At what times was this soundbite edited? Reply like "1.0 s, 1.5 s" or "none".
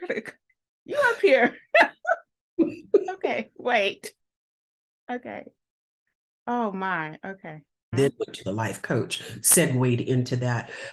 7.9 s